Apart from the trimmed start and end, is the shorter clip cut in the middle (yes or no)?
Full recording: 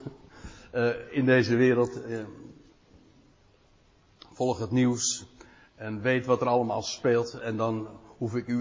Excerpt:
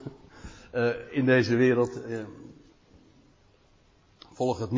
no